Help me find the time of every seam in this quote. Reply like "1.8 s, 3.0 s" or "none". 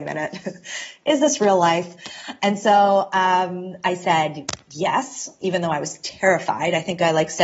none